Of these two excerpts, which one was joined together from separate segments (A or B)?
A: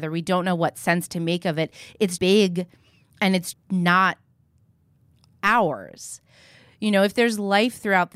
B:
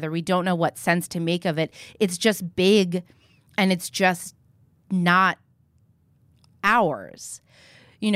A